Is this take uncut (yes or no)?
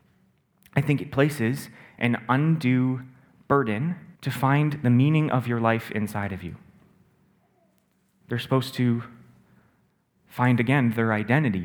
no